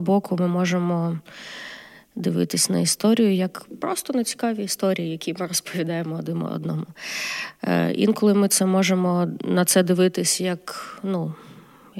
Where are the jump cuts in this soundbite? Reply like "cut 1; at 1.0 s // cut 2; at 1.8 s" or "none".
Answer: none